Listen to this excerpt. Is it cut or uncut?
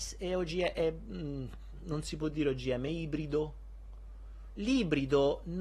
cut